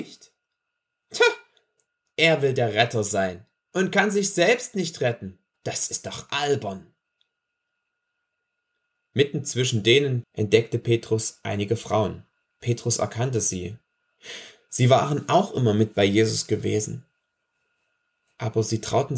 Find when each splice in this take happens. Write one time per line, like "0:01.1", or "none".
0:10.2
0:12.5